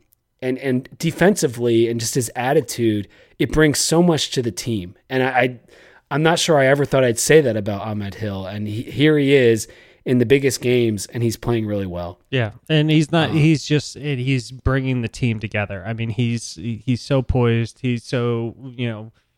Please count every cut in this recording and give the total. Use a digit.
0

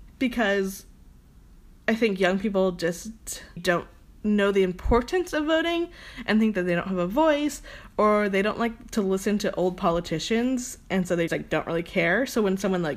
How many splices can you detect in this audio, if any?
2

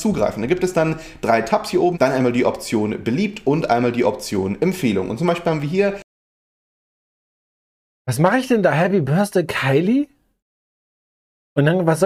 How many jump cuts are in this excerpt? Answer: 1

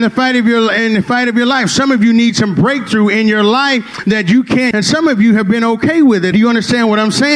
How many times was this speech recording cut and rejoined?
2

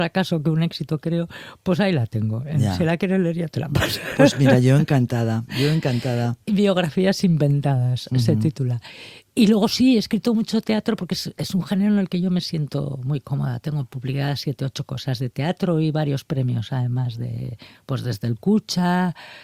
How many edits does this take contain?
0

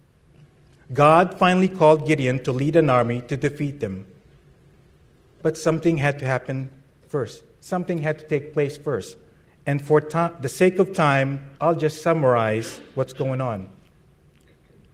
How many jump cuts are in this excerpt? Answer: 2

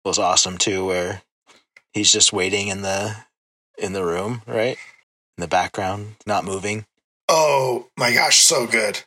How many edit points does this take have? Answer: 1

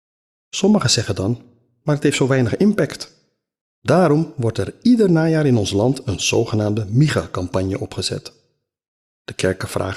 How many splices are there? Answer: 2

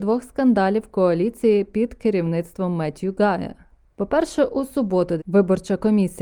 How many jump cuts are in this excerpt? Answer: 1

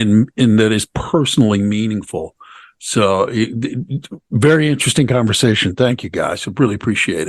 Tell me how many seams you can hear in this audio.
0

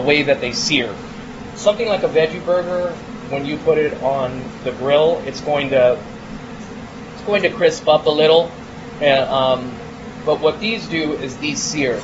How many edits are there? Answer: 0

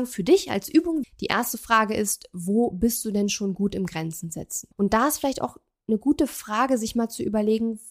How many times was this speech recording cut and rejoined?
2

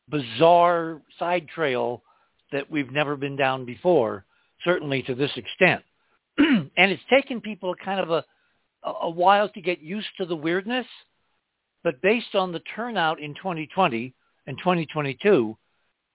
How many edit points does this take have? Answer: 0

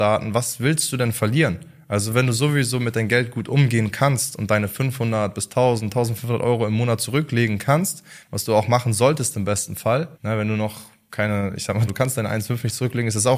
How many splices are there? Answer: 2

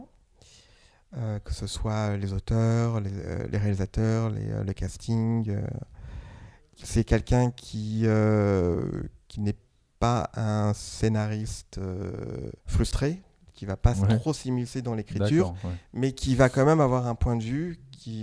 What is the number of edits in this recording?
1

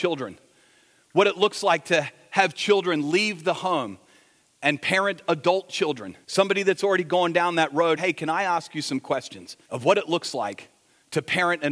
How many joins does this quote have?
3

